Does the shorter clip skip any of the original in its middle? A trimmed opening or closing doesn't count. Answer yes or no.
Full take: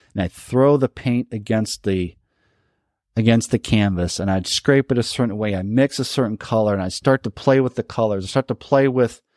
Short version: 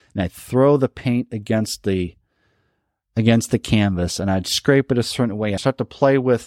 yes